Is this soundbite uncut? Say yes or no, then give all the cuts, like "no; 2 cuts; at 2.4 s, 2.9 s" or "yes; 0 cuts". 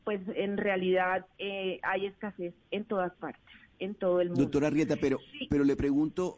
yes; 0 cuts